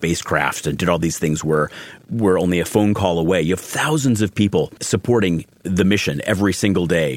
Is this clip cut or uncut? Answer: cut